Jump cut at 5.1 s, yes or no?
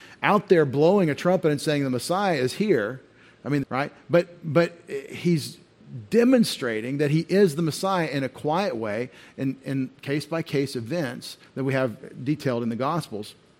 no